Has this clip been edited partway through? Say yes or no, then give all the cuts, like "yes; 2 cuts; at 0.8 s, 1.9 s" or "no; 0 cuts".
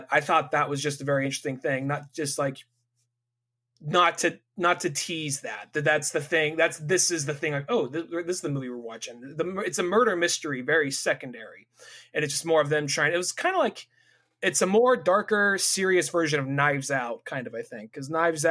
no; 0 cuts